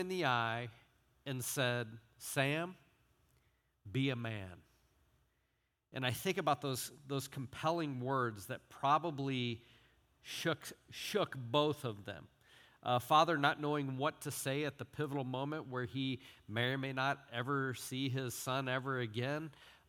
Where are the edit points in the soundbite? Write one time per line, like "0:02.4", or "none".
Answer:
none